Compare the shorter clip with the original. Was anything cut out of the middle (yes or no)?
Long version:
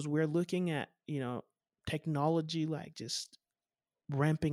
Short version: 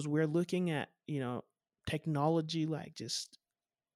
no